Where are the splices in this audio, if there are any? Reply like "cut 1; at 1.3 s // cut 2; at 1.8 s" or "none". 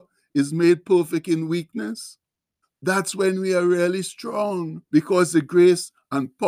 cut 1; at 2.6 s // cut 2; at 4.9 s